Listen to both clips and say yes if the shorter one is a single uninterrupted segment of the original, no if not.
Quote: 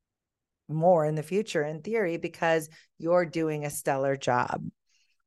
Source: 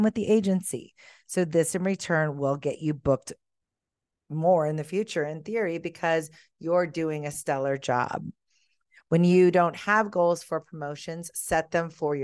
yes